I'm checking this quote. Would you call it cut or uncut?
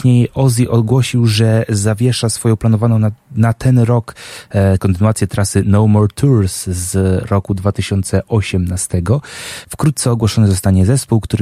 cut